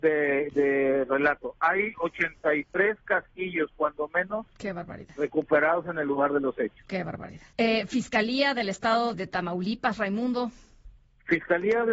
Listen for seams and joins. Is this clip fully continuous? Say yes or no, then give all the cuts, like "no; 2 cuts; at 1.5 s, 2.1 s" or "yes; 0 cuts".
no; 2 cuts; at 7.5 s, 9.1 s